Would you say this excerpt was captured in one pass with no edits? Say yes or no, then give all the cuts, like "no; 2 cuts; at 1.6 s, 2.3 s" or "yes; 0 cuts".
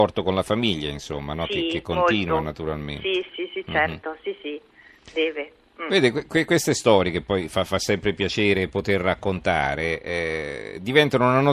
no; 1 cut; at 3.3 s